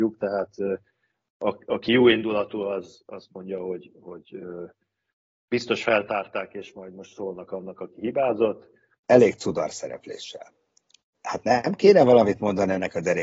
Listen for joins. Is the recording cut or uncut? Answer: cut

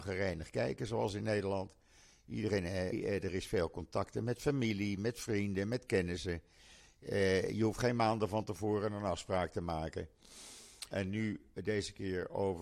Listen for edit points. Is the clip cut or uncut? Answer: cut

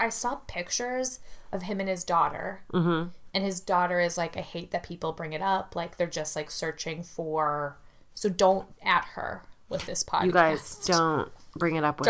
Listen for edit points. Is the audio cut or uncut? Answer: uncut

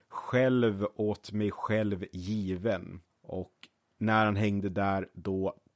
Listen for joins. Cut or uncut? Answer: cut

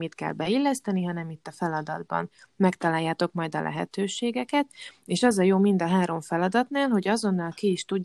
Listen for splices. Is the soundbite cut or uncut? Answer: uncut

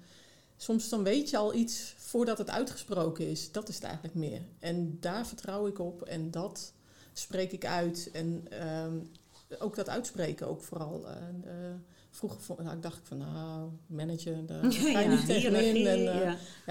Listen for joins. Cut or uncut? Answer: uncut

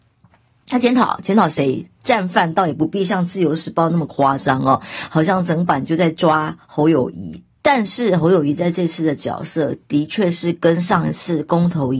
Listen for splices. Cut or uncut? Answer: cut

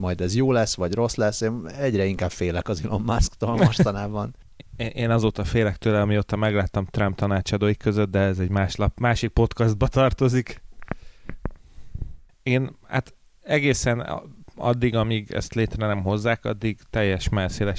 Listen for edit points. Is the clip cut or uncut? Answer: uncut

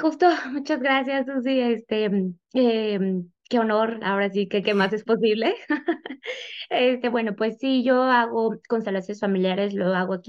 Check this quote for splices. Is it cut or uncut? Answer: uncut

